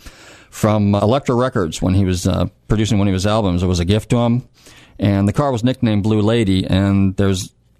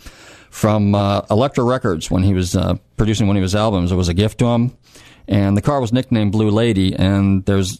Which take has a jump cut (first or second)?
first